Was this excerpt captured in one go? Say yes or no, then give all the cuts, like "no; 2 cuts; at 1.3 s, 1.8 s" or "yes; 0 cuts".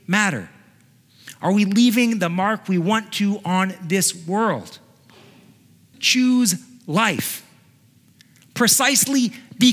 no; 1 cut; at 5.9 s